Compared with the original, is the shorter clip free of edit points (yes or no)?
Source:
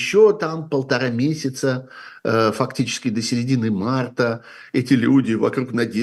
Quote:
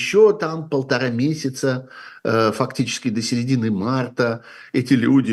yes